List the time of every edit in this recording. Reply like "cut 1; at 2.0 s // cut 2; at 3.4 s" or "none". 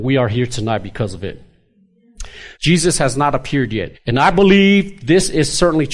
cut 1; at 2.5 s // cut 2; at 3.9 s